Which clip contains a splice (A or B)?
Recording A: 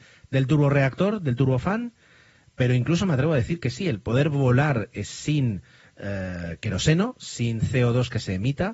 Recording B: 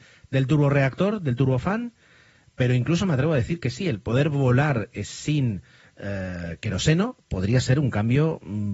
B